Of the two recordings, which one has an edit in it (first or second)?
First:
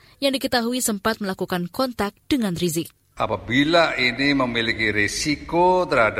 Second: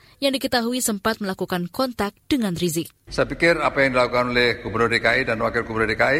second